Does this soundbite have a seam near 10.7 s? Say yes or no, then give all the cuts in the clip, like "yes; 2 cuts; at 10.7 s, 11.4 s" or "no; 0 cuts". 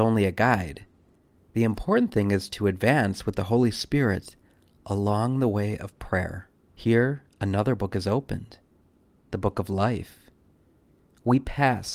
no; 1 cut; at 6.6 s